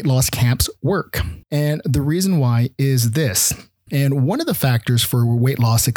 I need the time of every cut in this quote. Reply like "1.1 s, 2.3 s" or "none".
1.4 s, 3.9 s

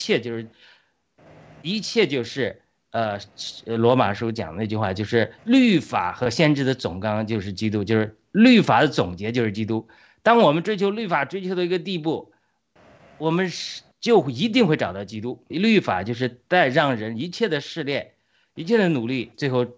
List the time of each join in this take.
5.4 s, 15.5 s

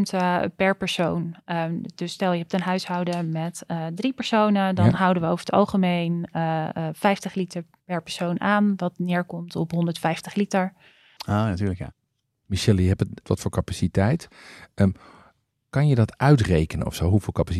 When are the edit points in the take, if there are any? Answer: 11.2 s, 13.2 s

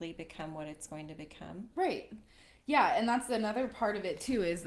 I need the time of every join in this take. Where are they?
1.7 s

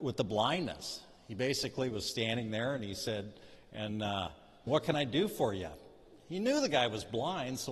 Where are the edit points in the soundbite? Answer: 4.7 s

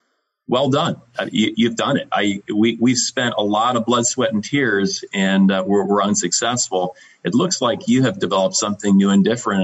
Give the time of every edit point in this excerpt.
none

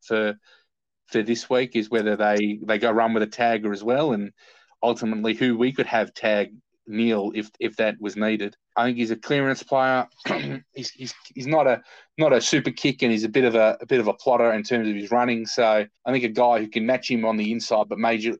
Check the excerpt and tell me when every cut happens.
8.7 s, 16.0 s

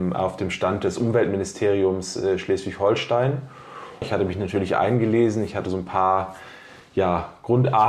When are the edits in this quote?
4.0 s

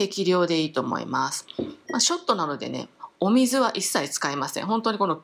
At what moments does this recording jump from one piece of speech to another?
1.9 s

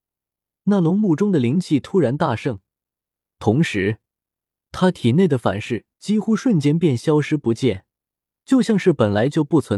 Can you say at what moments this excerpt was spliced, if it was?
5.9 s

